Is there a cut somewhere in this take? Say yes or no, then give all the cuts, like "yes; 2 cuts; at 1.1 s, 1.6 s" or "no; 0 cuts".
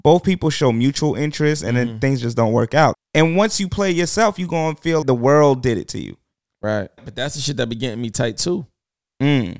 yes; 3 cuts; at 2.9 s, 5.0 s, 7.0 s